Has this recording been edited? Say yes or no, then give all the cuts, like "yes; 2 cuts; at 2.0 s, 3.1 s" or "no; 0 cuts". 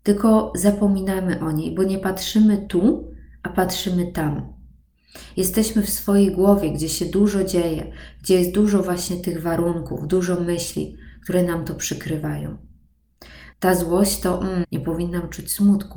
yes; 2 cuts; at 13.5 s, 14.6 s